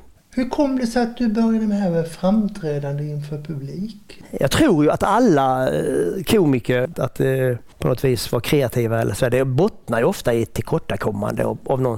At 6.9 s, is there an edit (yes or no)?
yes